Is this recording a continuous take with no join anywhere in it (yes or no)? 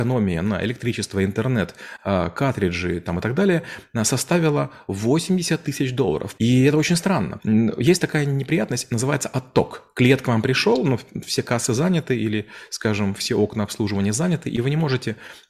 no